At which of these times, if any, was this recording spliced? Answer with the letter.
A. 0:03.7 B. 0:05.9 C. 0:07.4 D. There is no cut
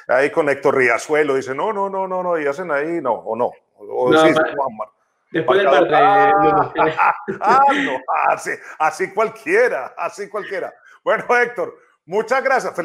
B